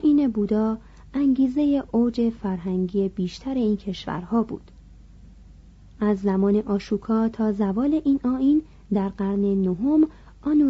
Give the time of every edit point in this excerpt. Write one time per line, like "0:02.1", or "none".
none

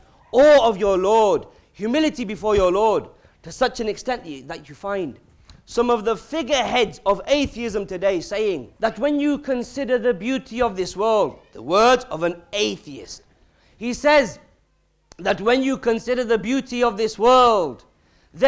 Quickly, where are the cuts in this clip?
0:08.8

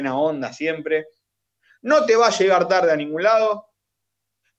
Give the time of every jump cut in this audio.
none

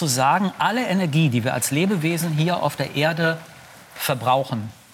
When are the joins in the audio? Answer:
none

